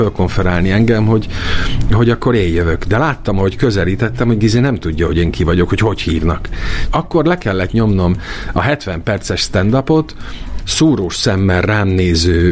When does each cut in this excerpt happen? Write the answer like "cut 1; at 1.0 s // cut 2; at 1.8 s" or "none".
cut 1; at 6.8 s // cut 2; at 10.6 s